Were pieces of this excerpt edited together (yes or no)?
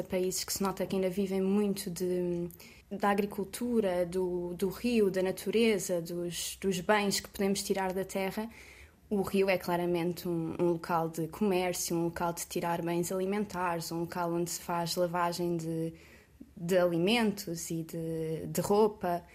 yes